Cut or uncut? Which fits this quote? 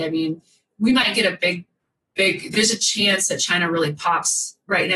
uncut